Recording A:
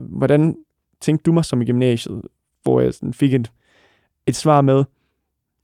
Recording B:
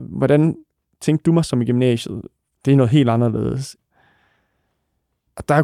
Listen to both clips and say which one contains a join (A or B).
B